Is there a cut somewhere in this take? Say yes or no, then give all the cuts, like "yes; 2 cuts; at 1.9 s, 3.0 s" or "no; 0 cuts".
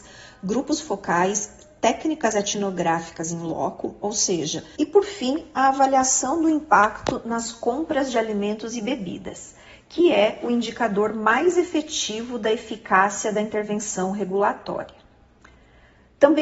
yes; 1 cut; at 4.8 s